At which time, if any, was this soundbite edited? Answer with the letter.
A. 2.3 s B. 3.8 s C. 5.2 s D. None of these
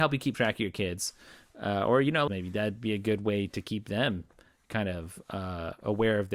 A